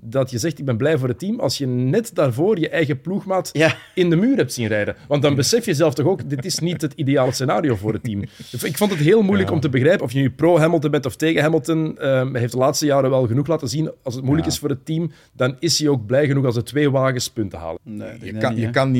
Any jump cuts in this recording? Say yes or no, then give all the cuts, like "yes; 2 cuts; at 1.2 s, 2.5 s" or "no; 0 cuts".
yes; 2 cuts; at 10.0 s, 17.8 s